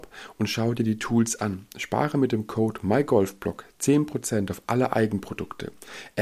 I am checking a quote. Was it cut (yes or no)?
no